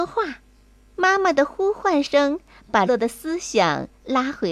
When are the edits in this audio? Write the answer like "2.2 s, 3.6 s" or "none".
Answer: 0.9 s, 2.9 s

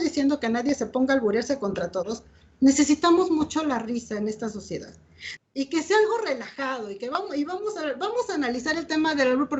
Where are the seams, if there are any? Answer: 5.4 s

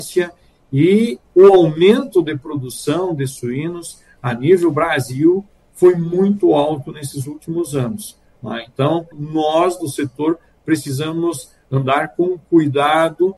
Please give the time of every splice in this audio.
9.1 s

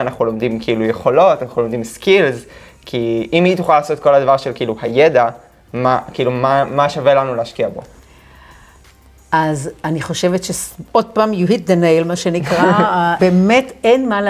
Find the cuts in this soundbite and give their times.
13.2 s

